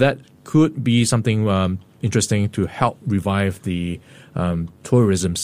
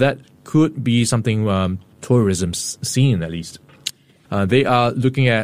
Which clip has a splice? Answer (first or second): second